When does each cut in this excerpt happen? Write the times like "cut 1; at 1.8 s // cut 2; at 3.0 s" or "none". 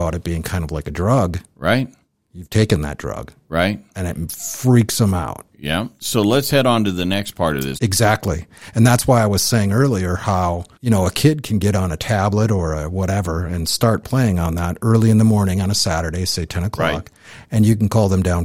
cut 1; at 7.8 s // cut 2; at 10.7 s

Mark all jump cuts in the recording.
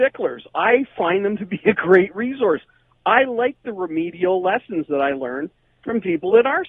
none

